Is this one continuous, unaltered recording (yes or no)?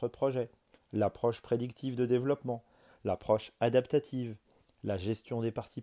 yes